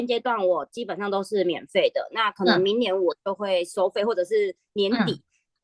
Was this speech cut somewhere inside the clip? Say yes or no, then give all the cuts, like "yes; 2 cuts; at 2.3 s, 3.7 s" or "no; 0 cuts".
no; 0 cuts